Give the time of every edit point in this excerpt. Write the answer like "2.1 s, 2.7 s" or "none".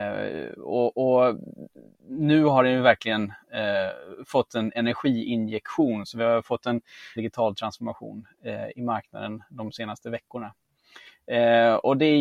7.2 s

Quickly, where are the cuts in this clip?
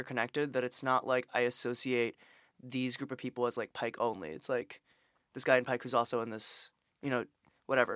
none

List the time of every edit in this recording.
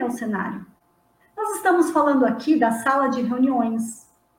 1.2 s

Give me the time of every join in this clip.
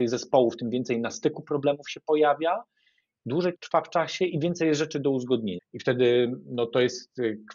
3.5 s, 5.6 s

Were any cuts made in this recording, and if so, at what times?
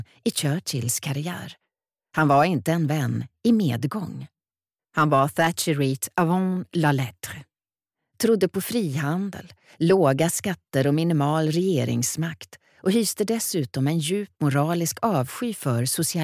4.8 s

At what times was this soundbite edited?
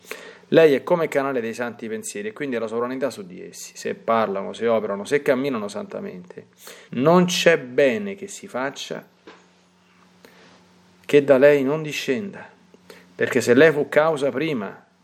6.9 s

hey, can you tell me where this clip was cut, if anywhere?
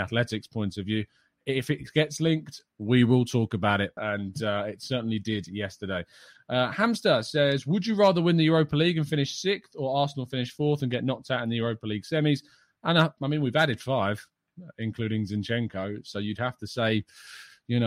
4.0 s, 12.8 s

